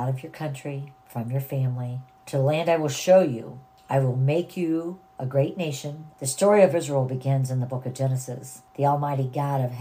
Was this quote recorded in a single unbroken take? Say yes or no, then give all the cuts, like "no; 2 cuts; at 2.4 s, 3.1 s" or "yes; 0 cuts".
no; 2 cuts; at 2.2 s, 6.1 s